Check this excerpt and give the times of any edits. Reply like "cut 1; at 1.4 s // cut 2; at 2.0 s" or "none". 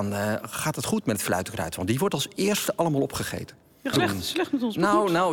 cut 1; at 3.9 s